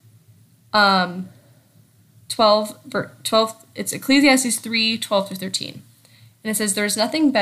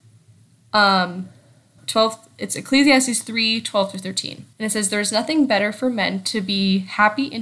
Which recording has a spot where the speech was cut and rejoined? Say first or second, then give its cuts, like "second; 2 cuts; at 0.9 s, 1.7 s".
second; 2 cuts; at 1.8 s, 4.5 s